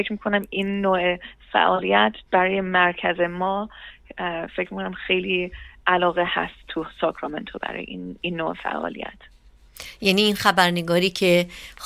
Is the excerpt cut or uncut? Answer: cut